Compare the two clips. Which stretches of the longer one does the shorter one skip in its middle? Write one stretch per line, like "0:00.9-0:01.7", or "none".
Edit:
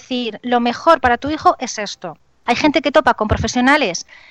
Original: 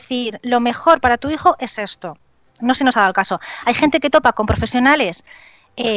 0:02.5-0:03.6